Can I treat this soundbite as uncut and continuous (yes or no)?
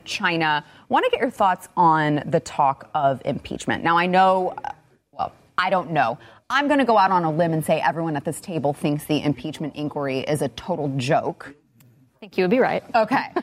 yes